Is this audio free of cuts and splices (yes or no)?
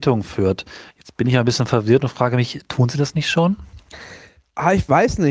yes